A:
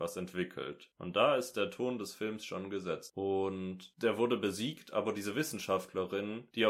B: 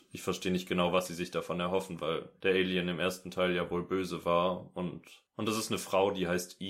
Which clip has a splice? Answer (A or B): A